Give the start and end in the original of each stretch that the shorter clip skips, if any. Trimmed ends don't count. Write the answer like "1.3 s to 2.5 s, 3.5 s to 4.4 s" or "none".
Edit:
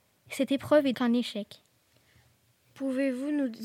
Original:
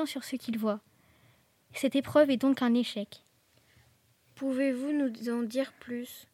2.4 s to 2.5 s